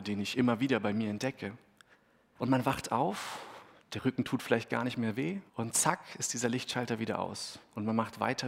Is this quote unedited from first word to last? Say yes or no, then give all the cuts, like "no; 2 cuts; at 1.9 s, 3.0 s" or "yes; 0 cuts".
no; 2 cuts; at 2.4 s, 5.5 s